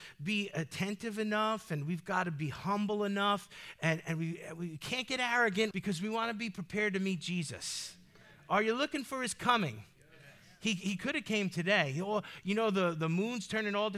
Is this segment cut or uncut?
cut